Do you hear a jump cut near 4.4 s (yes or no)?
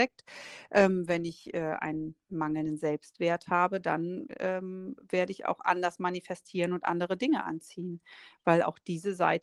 no